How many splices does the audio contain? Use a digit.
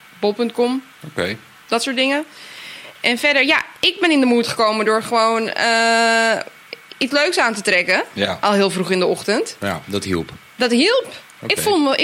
1